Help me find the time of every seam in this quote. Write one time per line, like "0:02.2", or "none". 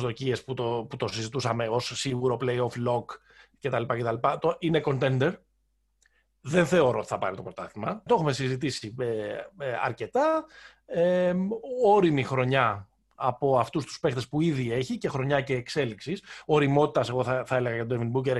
0:08.1